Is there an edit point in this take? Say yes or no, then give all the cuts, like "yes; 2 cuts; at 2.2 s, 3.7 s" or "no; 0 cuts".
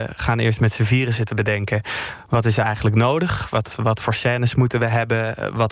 no; 0 cuts